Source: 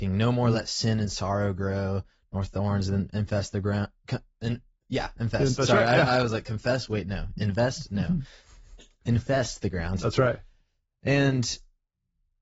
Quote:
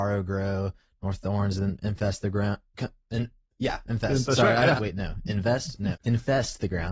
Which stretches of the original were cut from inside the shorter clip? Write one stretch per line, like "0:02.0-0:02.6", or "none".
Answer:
0:06.1-0:06.9
0:08.0-0:08.9

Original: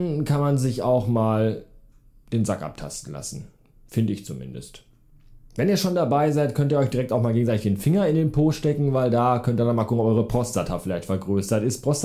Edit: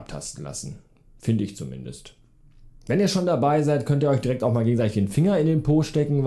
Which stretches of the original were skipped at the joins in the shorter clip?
none

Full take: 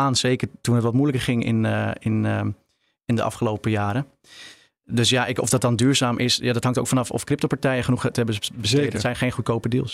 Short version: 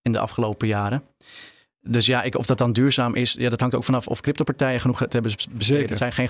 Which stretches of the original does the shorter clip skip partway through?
none

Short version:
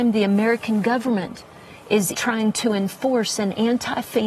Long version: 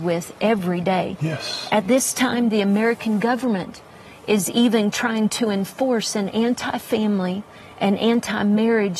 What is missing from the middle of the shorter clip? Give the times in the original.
0:04.5-0:04.9

